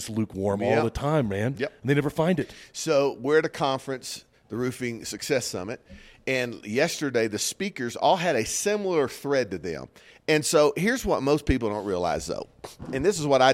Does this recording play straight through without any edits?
no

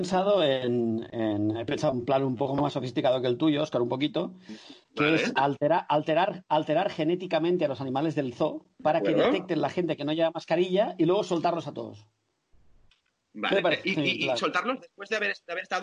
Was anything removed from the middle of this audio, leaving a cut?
yes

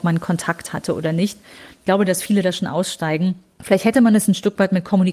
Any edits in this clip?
no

